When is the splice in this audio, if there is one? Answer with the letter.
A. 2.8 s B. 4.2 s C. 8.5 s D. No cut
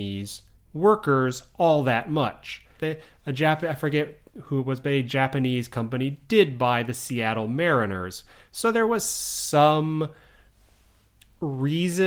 A